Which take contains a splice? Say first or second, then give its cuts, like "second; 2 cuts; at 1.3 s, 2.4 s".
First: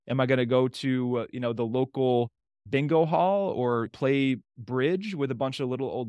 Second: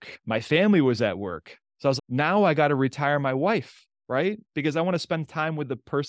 second; 1 cut; at 2.0 s